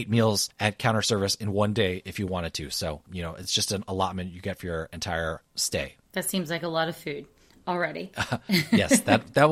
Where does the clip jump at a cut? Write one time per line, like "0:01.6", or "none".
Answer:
none